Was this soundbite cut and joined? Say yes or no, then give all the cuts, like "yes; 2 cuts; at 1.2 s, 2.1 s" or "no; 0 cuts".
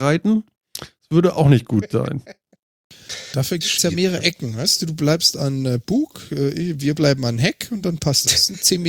no; 0 cuts